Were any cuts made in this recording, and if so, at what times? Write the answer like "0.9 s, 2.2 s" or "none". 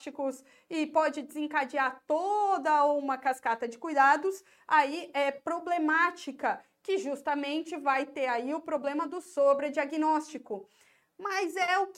none